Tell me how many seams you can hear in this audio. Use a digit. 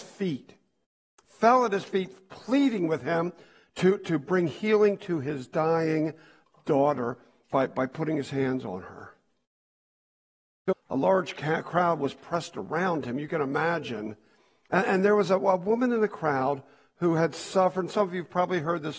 1